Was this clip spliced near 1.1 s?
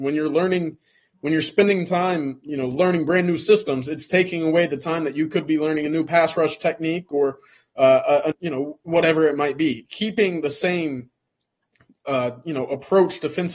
no; 2 cuts; at 8.3 s, 9.8 s

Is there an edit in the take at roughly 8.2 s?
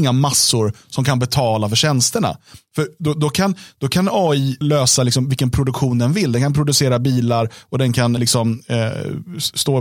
yes; 2 cuts; at 4.6 s, 8.2 s

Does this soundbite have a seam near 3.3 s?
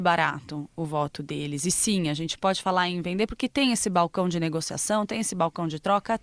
no; 0 cuts

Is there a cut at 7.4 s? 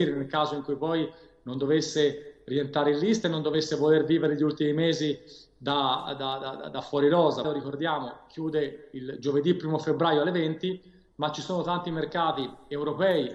yes; 1 cut; at 7.4 s

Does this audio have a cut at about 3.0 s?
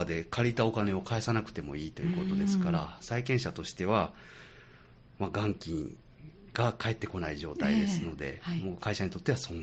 no; 0 cuts

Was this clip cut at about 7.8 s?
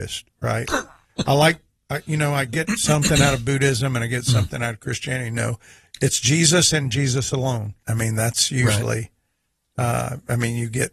yes; 1 cut; at 7.8 s

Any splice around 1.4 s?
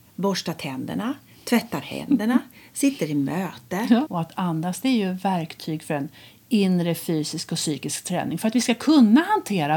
no; 1 cut; at 4.1 s

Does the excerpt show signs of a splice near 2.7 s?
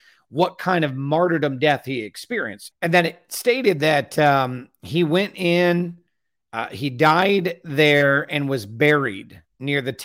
yes; 1 cut; at 2.7 s

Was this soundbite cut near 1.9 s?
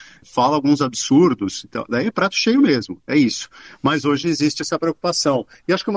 no; 0 cuts

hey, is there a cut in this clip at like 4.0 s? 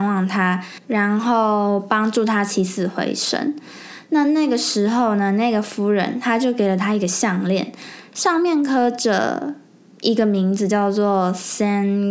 no; 0 cuts

